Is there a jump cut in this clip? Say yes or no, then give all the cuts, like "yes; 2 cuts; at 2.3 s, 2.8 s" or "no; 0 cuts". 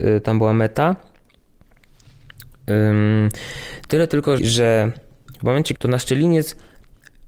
yes; 2 cuts; at 4.4 s, 5.8 s